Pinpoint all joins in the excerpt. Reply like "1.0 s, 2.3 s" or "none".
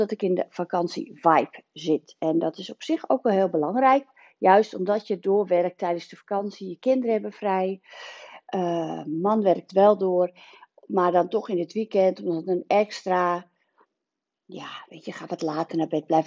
none

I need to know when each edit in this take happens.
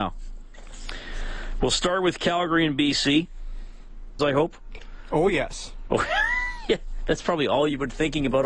4.2 s

